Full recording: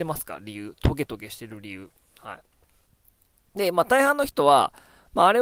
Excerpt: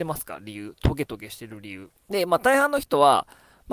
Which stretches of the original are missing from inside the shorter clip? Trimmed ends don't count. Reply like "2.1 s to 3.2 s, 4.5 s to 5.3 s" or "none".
2.1 s to 3.5 s